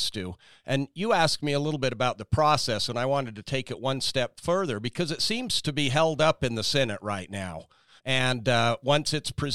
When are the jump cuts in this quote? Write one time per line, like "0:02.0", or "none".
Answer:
0:08.0